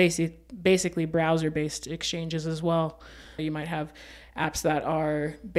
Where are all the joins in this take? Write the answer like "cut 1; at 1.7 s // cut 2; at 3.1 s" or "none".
cut 1; at 3.4 s